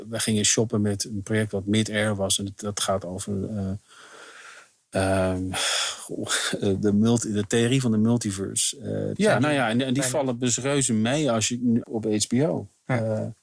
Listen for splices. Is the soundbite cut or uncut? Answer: cut